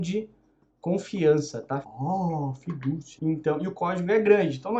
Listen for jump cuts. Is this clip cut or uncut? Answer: cut